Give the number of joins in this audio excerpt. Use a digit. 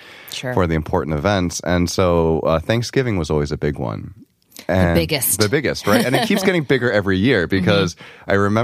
0